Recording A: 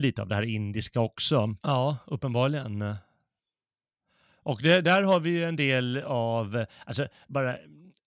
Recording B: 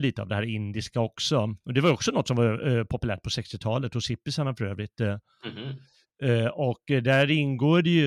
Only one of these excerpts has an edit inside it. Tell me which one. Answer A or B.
A